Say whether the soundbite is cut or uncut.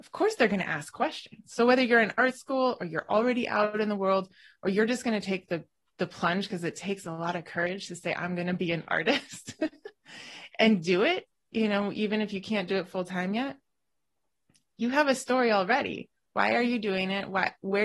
uncut